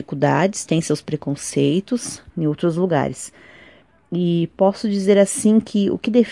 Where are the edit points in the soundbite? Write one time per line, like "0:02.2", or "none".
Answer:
0:02.3